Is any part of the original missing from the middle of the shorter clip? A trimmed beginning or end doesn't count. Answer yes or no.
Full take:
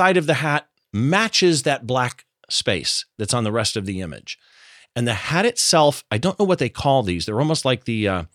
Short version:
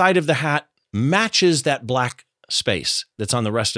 no